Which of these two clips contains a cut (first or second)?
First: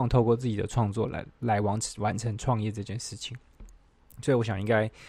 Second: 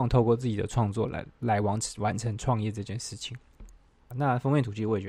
second